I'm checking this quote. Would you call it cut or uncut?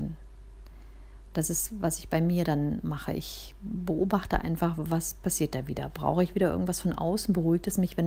uncut